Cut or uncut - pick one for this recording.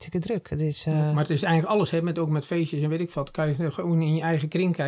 uncut